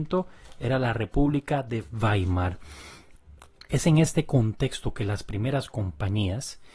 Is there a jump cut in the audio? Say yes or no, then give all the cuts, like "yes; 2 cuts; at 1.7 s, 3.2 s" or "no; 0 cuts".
no; 0 cuts